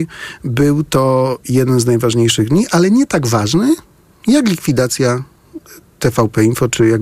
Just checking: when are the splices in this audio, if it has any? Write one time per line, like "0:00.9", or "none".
none